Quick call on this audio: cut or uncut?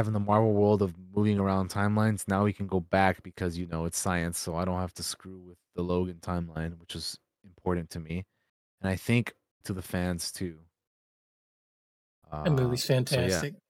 cut